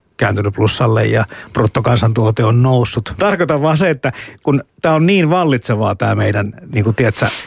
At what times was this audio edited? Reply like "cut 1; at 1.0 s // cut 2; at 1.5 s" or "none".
cut 1; at 3.2 s